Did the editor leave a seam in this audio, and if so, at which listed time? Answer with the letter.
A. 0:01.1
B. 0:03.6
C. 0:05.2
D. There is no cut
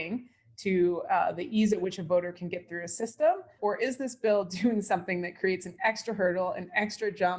B